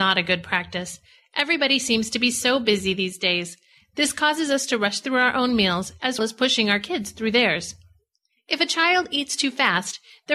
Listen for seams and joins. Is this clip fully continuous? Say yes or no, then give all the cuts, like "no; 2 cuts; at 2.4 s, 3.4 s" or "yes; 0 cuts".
no; 1 cut; at 6.2 s